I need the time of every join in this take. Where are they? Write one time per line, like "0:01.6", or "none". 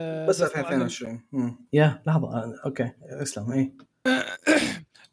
0:01.7